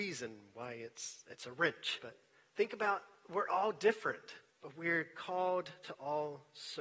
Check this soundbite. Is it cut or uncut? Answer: cut